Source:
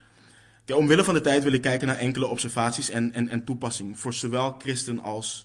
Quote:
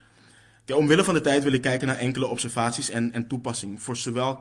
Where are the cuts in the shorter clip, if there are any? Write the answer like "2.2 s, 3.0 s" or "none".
3.1 s